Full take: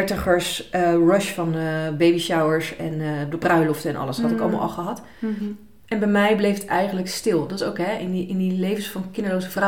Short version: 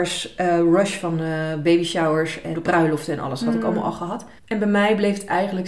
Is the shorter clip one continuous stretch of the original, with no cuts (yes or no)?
no